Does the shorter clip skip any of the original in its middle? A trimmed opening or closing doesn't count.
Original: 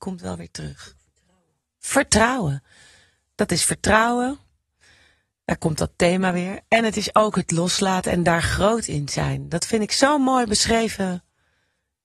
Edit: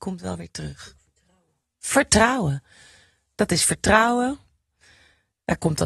no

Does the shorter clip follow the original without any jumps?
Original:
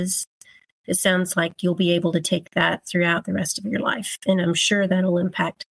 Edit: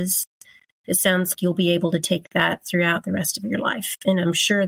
no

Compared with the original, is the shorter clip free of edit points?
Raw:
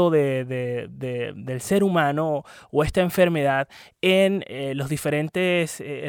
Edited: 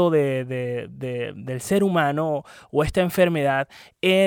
yes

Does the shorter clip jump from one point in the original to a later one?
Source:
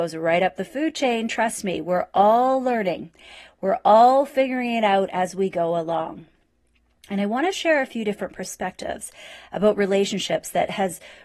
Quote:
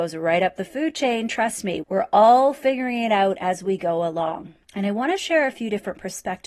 yes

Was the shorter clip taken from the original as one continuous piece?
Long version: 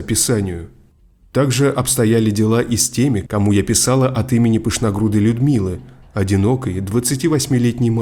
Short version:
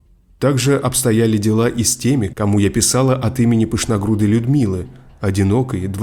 yes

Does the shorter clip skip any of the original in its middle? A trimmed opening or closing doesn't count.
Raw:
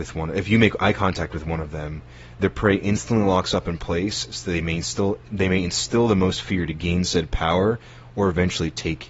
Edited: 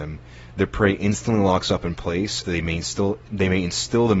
yes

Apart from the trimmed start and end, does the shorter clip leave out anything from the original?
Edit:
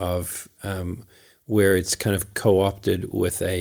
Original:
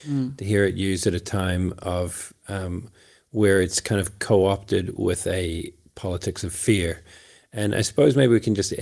no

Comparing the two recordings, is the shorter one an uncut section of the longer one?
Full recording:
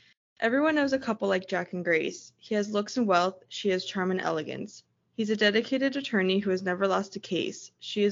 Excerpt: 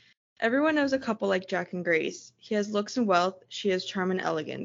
yes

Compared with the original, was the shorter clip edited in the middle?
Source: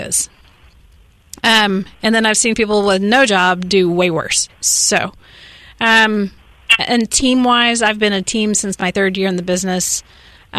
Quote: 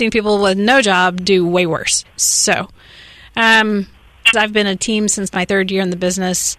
yes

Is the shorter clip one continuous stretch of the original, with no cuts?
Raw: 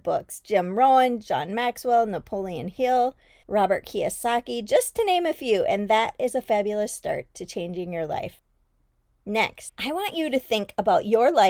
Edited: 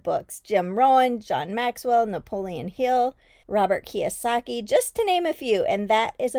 yes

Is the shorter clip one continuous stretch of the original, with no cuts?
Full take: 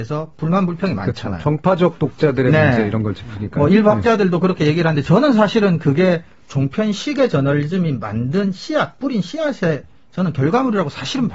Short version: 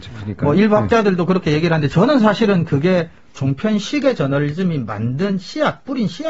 yes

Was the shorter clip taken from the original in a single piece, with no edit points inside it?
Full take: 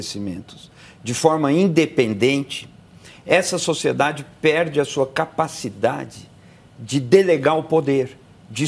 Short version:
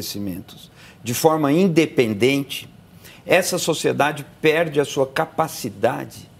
yes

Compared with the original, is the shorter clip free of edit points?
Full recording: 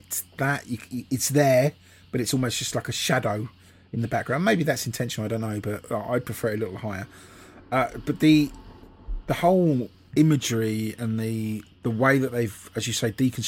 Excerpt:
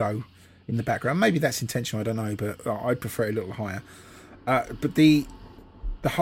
yes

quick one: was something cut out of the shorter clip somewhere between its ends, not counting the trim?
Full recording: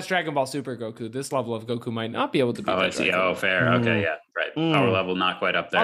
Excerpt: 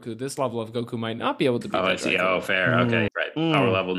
yes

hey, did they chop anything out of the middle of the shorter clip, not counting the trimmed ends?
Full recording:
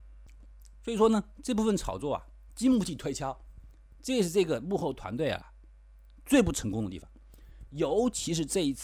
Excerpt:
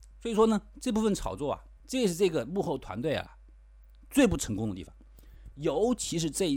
yes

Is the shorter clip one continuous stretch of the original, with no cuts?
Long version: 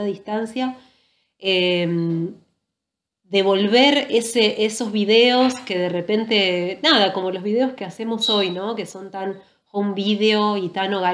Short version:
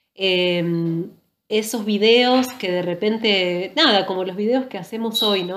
no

